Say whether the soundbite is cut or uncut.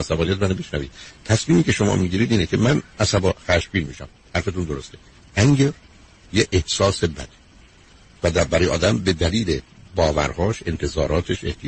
uncut